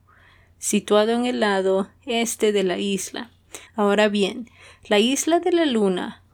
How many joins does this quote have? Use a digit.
1